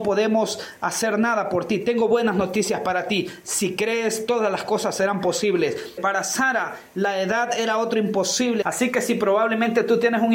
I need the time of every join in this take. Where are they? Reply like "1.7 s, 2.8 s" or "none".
6.0 s, 8.6 s